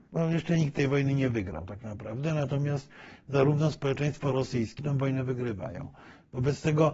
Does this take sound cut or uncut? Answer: cut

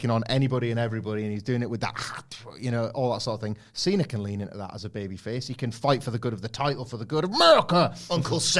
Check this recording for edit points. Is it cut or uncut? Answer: uncut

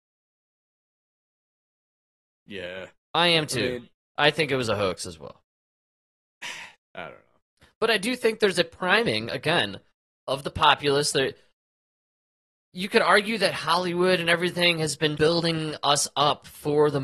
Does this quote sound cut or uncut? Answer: cut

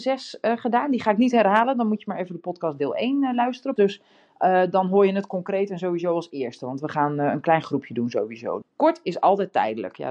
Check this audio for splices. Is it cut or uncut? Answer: cut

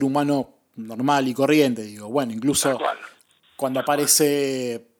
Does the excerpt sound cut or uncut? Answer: uncut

